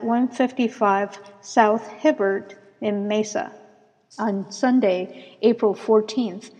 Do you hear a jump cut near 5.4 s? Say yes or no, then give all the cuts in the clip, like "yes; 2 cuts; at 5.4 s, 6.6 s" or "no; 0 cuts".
no; 1 cut; at 4.1 s